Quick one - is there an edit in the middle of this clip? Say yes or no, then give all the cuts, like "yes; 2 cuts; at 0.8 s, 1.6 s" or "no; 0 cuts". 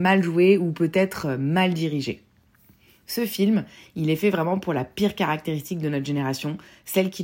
no; 0 cuts